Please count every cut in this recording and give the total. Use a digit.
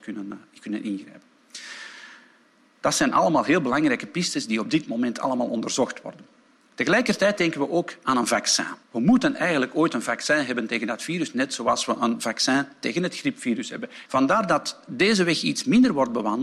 2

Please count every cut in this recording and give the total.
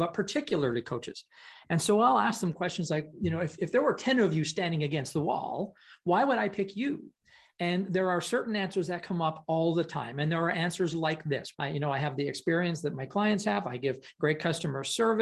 1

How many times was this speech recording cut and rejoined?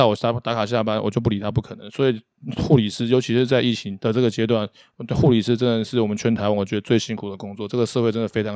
0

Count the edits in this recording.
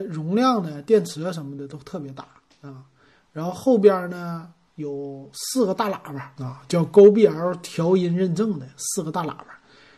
1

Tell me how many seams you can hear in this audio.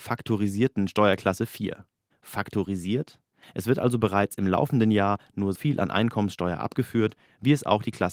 2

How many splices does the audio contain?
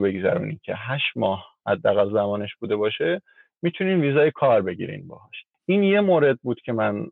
1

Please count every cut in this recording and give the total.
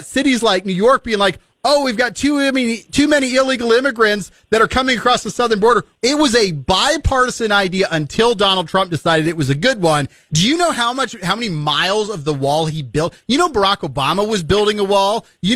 2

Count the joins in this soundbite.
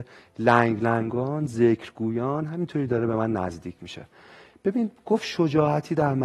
0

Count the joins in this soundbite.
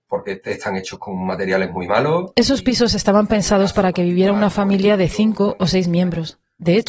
0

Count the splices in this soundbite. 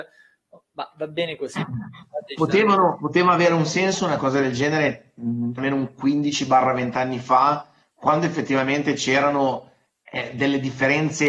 1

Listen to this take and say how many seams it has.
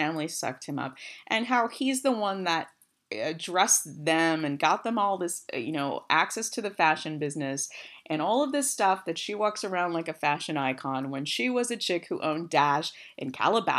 0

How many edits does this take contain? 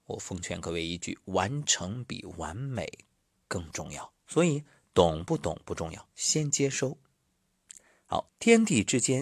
3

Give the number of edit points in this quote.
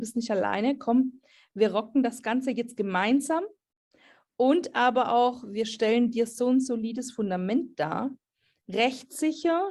0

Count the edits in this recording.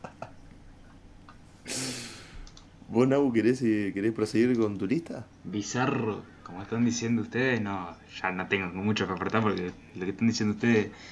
1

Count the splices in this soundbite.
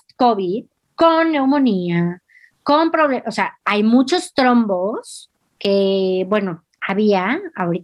1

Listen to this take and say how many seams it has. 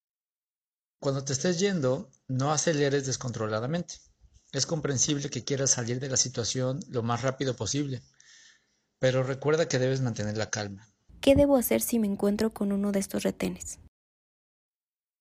2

